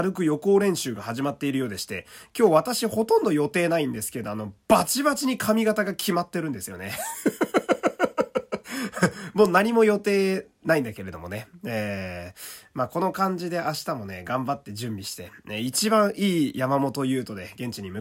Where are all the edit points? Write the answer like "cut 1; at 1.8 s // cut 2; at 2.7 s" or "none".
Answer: none

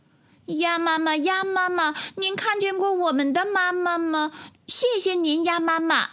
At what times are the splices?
cut 1; at 4.6 s

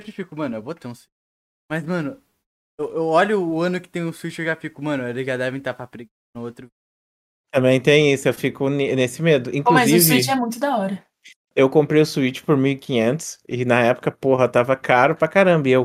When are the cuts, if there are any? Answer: none

